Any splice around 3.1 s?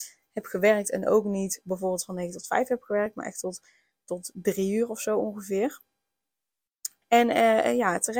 no; 1 cut; at 7.0 s

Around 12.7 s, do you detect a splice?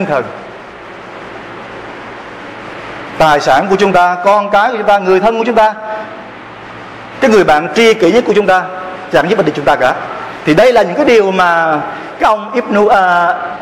no; 0 cuts

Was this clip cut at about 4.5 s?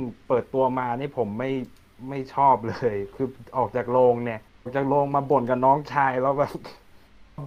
yes; 1 cut; at 4.5 s

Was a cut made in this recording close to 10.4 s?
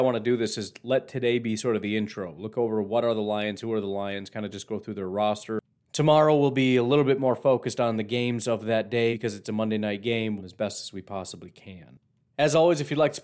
yes; 2 cuts; at 9.1 s, 10.4 s

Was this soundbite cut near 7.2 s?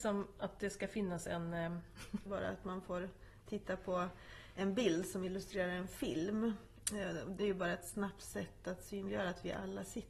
no; 1 cut; at 2.3 s

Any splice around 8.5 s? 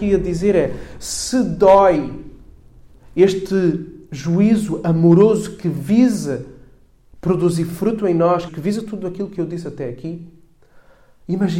yes; 1 cut; at 8.5 s

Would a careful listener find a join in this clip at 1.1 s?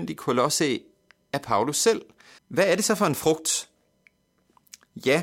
no; 1 cut; at 2.4 s

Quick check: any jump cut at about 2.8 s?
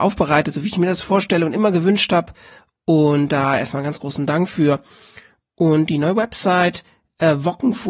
no; 0 cuts

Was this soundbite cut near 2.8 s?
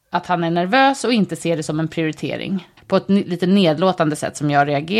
yes; 1 cut; at 2.8 s

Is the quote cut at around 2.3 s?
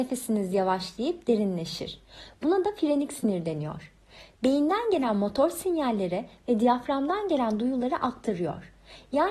yes; 1 cut; at 2.3 s

